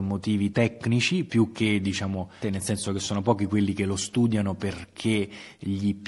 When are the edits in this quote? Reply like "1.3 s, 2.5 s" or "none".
2.4 s

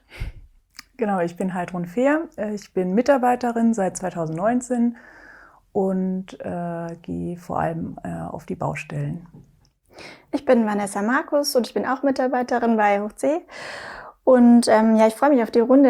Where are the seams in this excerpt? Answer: none

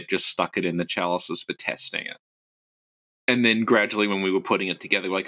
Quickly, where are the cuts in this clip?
none

